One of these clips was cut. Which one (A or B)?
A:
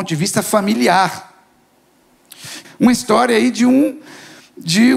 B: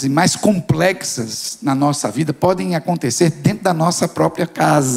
A